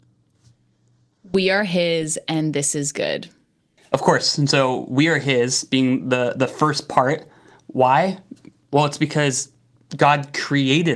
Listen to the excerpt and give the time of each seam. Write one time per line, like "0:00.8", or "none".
0:03.8

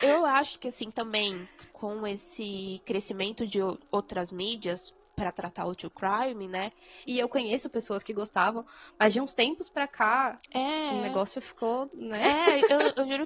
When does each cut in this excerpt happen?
0:01.7
0:07.1

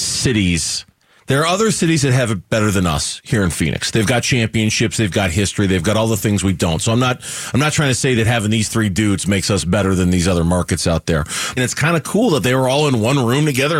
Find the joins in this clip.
0:11.6

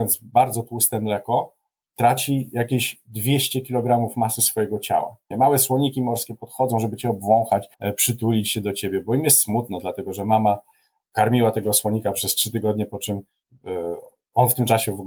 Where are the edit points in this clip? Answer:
0:05.3
0:07.7

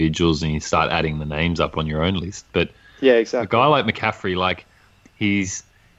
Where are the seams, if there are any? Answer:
none

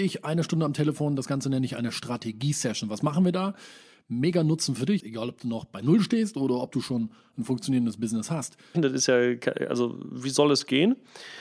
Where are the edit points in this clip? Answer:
0:05.0
0:08.7

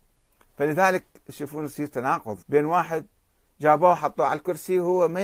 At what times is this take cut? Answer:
0:02.4

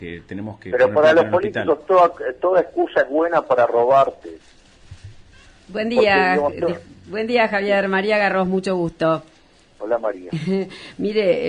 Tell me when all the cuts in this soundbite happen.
none

